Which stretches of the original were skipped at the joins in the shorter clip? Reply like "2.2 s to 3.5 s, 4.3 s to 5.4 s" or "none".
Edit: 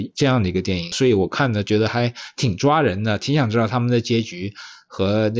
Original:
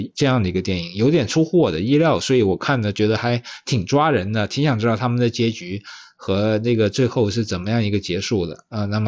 0.9 s to 2.2 s